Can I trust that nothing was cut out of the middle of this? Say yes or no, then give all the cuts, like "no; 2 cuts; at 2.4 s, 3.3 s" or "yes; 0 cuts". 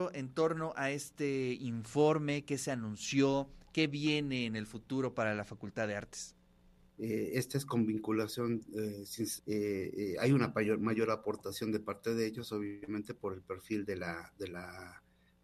no; 2 cuts; at 6.9 s, 9.4 s